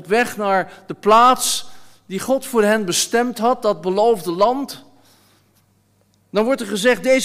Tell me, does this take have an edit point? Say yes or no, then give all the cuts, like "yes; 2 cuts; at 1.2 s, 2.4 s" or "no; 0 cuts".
no; 0 cuts